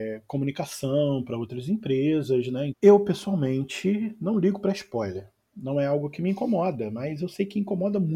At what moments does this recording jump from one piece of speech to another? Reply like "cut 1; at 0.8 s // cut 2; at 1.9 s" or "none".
cut 1; at 2.7 s